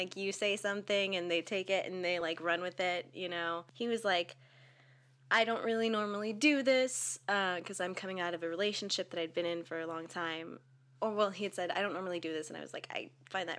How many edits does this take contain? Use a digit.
0